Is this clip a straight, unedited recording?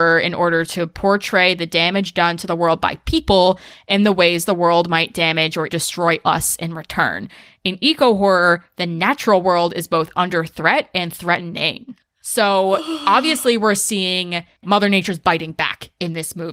no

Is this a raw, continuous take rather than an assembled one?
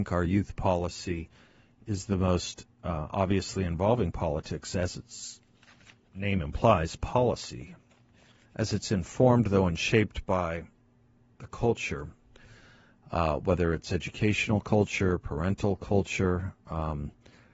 yes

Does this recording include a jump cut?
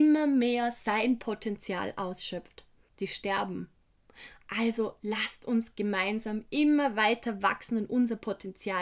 yes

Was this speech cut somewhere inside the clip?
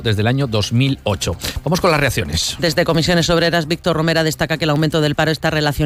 no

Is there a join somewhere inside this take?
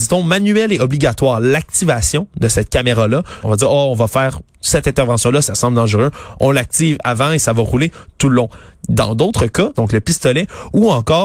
yes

